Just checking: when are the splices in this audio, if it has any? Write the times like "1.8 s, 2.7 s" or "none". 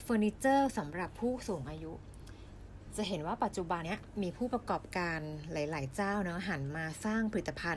3.8 s